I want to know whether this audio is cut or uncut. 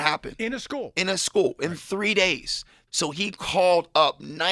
cut